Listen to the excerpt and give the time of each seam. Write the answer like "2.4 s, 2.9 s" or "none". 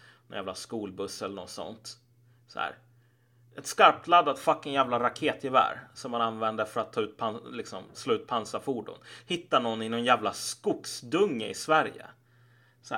none